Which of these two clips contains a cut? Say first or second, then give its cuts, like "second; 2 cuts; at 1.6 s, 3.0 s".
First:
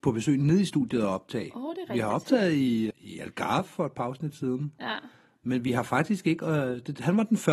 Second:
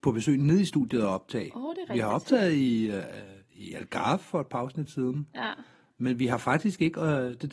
first; 1 cut; at 2.9 s